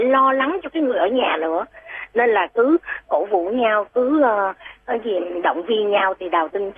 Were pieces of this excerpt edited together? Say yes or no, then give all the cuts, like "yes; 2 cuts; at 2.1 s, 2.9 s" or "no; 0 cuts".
yes; 1 cut; at 3.0 s